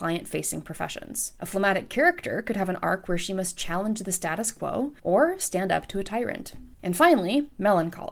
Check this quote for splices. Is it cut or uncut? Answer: cut